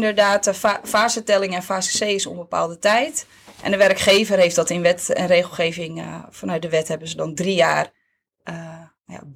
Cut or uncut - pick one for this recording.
uncut